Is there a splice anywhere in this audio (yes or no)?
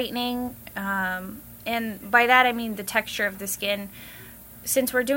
no